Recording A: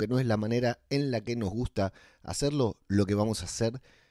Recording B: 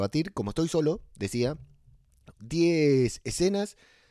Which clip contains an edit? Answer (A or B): B